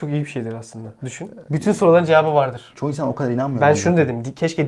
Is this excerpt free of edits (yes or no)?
no